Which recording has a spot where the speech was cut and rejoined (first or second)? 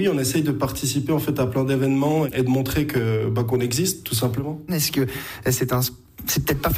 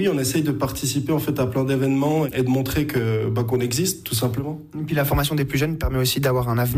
first